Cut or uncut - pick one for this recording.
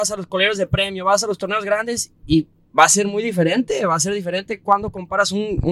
uncut